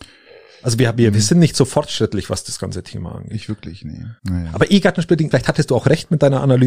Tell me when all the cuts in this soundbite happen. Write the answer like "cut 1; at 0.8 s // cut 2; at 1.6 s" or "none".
cut 1; at 4.2 s // cut 2; at 5.3 s

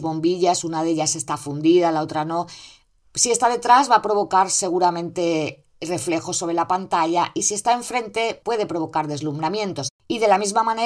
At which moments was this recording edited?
cut 1; at 3.0 s // cut 2; at 8.4 s

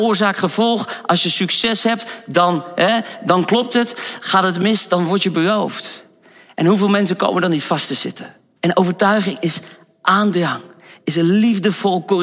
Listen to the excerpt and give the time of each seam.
cut 1; at 8.6 s

